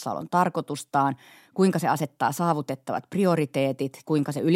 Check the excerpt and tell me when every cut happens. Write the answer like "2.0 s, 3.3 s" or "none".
none